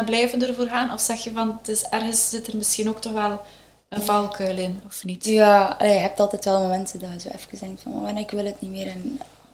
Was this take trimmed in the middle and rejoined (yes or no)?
no